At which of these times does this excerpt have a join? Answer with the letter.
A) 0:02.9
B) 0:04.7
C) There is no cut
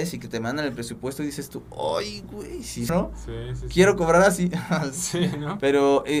A